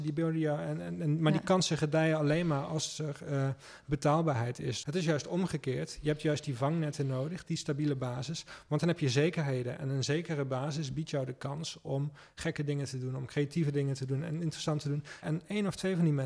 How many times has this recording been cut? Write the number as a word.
two